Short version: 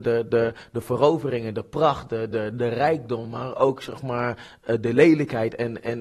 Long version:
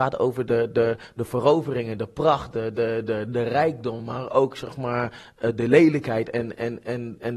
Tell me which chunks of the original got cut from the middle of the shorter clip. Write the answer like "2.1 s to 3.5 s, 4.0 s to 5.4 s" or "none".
2.7 s to 3.1 s

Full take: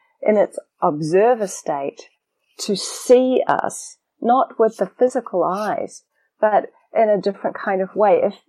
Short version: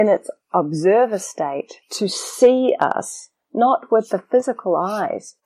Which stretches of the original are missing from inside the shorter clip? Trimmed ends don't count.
2.1 s to 2.5 s

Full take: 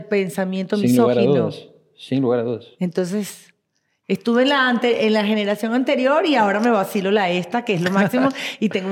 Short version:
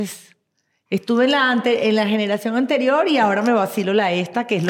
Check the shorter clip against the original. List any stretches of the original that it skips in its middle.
none

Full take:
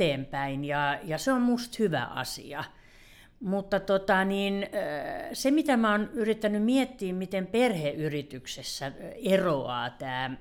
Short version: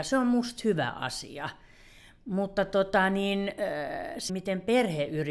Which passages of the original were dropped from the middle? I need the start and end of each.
5.4 s to 7.1 s

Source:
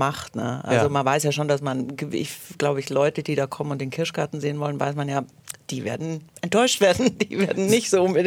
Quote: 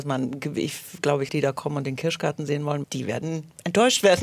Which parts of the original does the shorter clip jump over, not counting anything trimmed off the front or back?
2.9 s to 3.2 s, 4.8 s to 5.6 s

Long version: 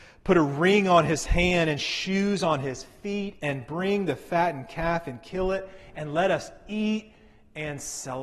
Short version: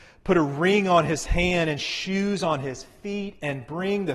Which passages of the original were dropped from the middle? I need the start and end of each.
none

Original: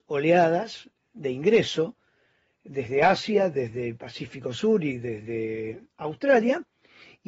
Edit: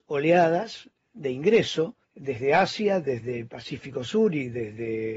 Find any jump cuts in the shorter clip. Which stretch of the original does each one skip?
2.0 s to 2.5 s

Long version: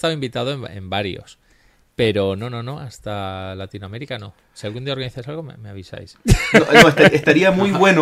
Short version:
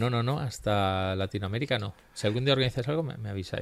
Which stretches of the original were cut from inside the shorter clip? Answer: none

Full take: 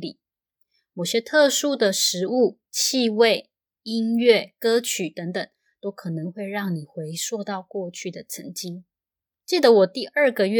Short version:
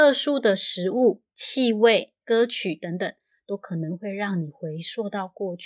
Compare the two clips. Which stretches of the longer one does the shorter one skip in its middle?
3.6 s to 4.6 s

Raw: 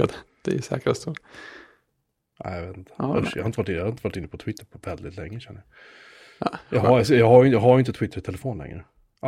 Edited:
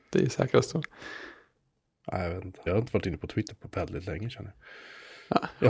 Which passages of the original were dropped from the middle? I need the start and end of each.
3.0 s to 3.8 s

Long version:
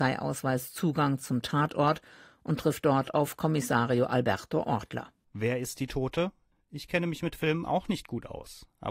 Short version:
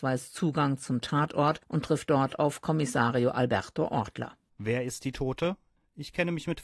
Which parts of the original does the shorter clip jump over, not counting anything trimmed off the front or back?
2.0 s to 2.4 s

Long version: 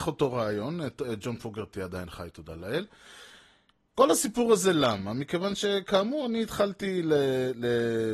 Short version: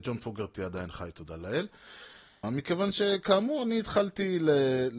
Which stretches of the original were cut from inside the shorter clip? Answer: 3.6 s to 5.1 s

